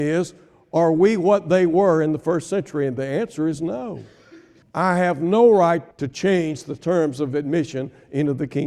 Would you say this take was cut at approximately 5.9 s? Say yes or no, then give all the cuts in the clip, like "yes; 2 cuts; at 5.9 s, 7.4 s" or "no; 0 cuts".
yes; 2 cuts; at 4.6 s, 5.9 s